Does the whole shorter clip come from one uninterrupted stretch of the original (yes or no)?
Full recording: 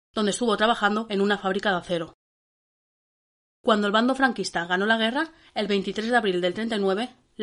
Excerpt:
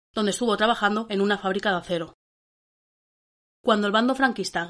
yes